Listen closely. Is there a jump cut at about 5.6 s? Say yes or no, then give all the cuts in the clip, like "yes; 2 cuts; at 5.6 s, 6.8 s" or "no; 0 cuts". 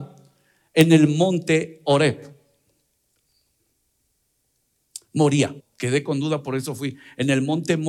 yes; 1 cut; at 5.6 s